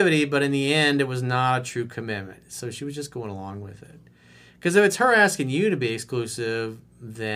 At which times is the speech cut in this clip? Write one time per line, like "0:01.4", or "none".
none